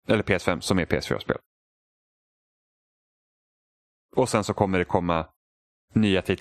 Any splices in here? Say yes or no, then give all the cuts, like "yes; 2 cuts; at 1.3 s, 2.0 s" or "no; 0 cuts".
no; 0 cuts